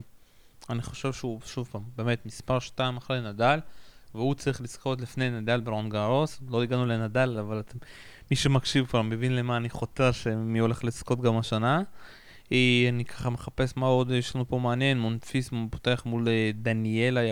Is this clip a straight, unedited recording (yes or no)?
yes